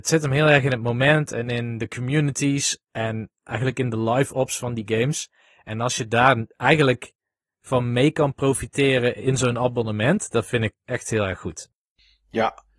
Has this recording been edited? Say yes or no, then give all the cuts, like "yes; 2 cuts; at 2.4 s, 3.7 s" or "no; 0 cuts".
no; 0 cuts